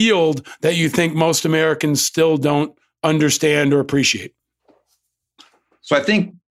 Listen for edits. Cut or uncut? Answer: uncut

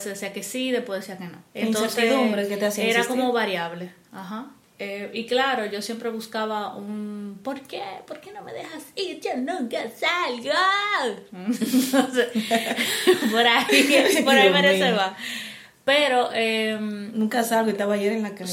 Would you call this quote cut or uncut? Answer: uncut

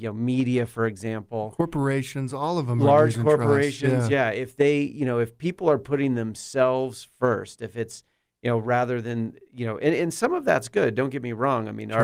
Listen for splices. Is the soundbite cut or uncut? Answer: uncut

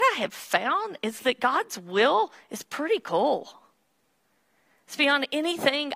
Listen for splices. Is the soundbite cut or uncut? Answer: uncut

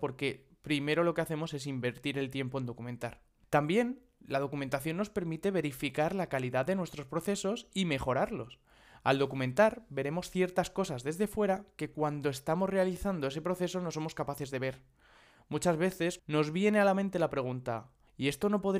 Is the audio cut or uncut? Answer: cut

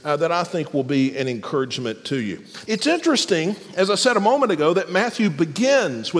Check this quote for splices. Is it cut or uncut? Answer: cut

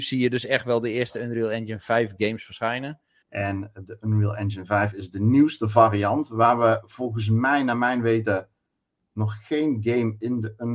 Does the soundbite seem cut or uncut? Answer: cut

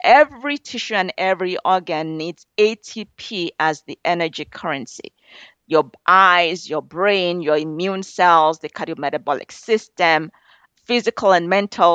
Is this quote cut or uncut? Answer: uncut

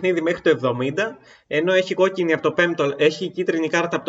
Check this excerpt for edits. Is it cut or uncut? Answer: uncut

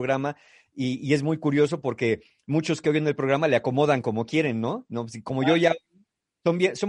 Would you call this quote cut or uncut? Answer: uncut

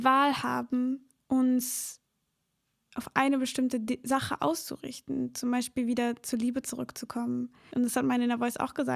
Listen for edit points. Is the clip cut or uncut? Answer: cut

